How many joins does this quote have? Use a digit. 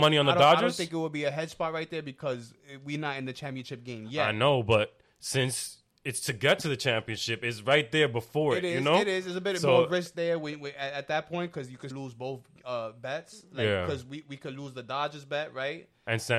1